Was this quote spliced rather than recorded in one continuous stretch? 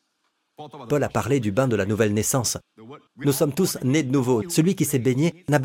yes; 2 cuts; at 3.1 s, 4.4 s

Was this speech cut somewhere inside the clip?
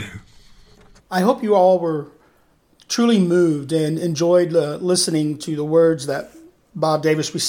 yes; 1 cut; at 1.0 s

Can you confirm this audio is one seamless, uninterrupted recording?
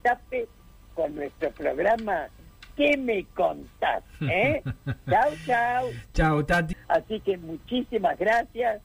no; 1 cut; at 6.7 s

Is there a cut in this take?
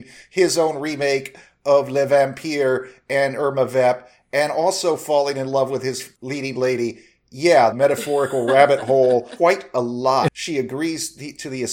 yes; 2 cuts; at 7.7 s, 10.3 s

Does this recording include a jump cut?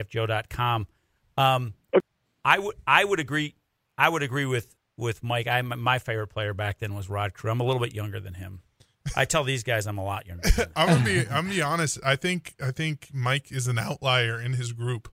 no; 0 cuts

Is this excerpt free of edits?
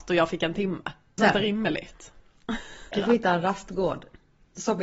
no; 2 cuts; at 1.2 s, 2.9 s

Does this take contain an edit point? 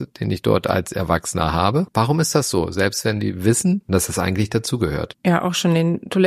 no; 0 cuts

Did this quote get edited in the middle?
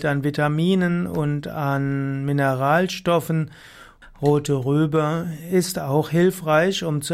yes; 1 cut; at 4.0 s

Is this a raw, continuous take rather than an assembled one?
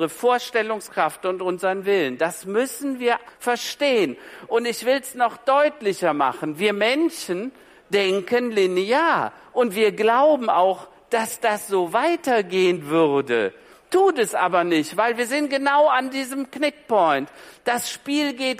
no; 1 cut; at 3.3 s

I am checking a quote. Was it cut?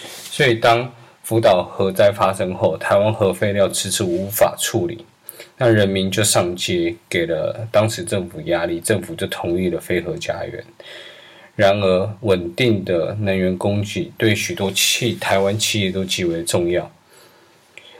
no; 0 cuts

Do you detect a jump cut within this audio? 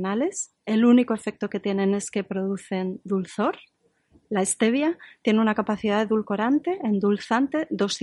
no; 0 cuts

